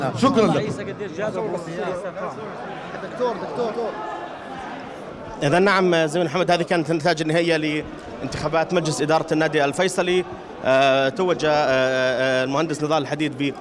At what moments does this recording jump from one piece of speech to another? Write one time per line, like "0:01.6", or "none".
0:03.7